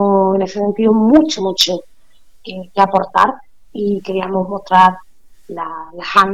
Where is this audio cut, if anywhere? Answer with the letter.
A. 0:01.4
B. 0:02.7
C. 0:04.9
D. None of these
A